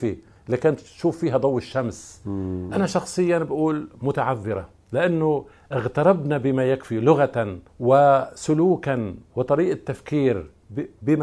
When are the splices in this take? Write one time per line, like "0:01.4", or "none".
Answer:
0:02.7
0:07.7